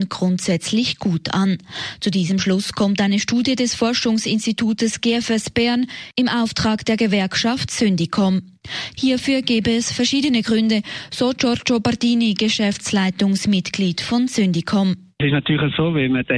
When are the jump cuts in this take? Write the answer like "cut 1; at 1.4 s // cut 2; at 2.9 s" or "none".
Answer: cut 1; at 8.9 s